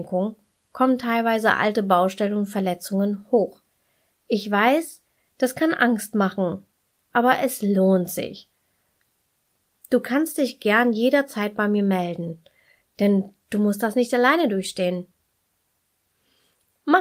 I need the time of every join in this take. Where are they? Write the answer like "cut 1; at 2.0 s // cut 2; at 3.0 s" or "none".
cut 1; at 4.1 s